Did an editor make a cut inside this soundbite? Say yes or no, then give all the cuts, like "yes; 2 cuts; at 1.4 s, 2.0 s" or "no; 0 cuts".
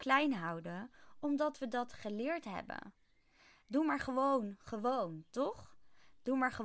no; 0 cuts